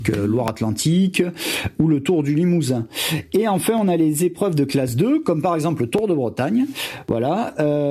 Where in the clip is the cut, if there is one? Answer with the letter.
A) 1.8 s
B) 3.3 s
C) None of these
C